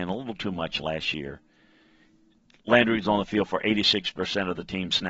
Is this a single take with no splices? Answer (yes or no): yes